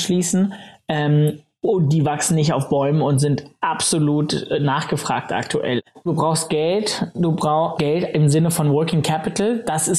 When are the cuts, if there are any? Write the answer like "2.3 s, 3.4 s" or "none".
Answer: 1.6 s, 6.1 s, 7.7 s